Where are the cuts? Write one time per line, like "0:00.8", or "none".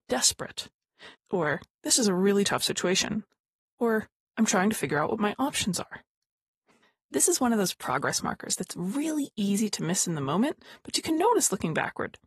0:01.1